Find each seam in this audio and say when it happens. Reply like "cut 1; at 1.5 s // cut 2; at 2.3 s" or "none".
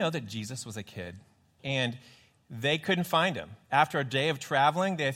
cut 1; at 1.6 s

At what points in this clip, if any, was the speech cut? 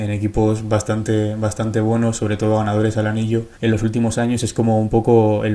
cut 1; at 3.6 s

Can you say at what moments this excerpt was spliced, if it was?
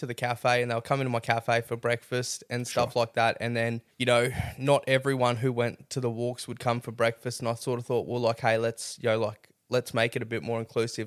cut 1; at 3.9 s

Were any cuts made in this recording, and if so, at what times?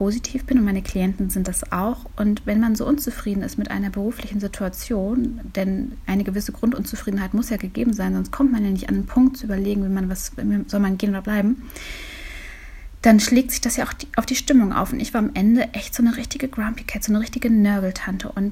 none

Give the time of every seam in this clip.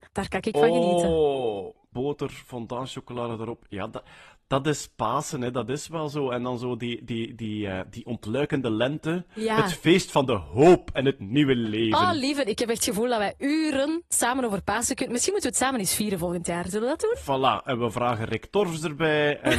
cut 1; at 1.9 s

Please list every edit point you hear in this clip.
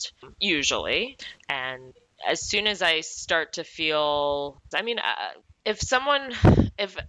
cut 1; at 1.4 s // cut 2; at 4.7 s

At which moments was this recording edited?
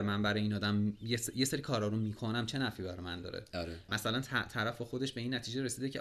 cut 1; at 3.9 s

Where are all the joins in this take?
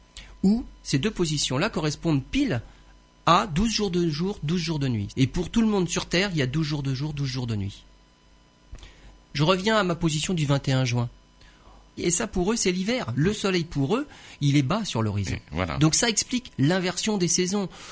cut 1; at 5.1 s // cut 2; at 12.0 s

